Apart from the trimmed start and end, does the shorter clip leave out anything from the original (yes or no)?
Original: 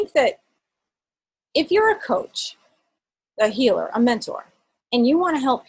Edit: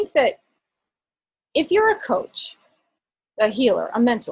no